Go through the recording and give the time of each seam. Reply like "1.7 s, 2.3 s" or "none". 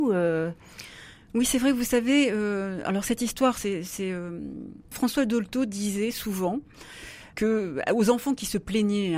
4.9 s